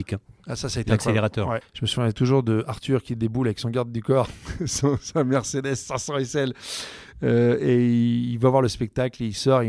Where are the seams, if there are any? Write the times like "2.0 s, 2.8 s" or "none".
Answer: 1.6 s